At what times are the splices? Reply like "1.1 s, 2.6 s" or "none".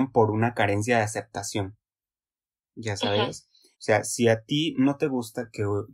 3.7 s